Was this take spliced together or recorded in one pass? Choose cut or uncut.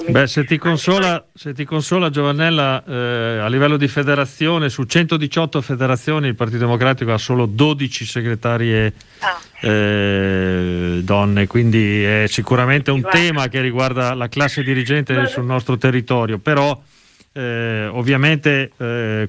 uncut